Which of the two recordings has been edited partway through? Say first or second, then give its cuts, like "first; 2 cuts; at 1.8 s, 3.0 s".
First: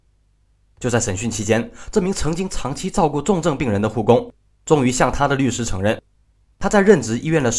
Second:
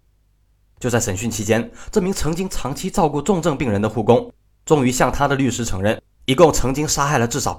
second; 1 cut; at 6.2 s